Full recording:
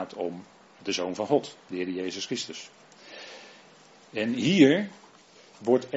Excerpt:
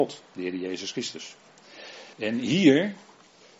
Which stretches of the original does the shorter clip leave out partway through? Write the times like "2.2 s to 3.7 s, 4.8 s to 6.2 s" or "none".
3.5 s to 4.1 s